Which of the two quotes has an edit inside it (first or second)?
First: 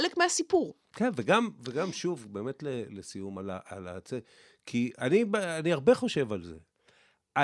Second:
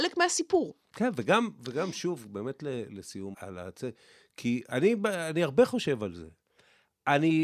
second